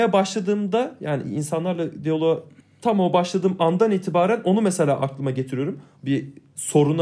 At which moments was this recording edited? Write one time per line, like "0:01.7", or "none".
0:06.0